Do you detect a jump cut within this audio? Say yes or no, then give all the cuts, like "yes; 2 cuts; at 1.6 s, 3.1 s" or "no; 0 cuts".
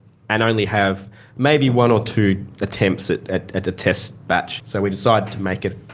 yes; 1 cut; at 4.6 s